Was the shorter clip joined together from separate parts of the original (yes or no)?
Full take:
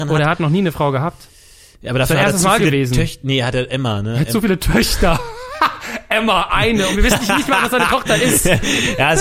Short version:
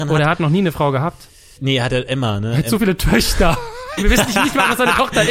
yes